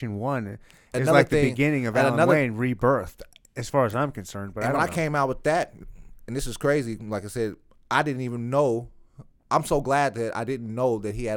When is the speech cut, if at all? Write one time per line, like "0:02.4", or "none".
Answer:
none